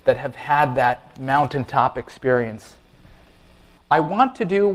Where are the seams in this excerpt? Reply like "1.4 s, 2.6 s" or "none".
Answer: 3.8 s